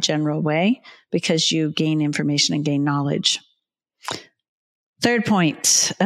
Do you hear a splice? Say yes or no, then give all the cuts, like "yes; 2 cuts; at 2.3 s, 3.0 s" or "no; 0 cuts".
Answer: no; 0 cuts